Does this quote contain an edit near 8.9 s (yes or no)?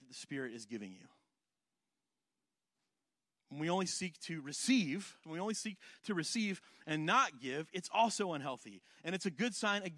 no